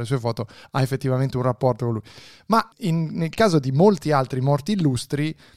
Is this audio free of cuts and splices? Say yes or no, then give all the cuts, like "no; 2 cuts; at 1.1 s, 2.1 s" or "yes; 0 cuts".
no; 1 cut; at 2.7 s